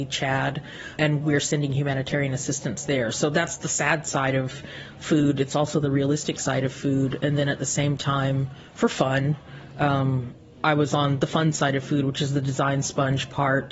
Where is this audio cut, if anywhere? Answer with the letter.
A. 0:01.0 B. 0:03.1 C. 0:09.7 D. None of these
A